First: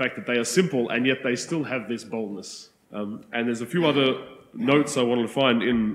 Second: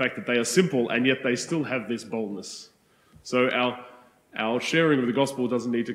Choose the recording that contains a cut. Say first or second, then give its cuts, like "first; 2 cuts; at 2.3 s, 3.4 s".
first; 1 cut; at 2.8 s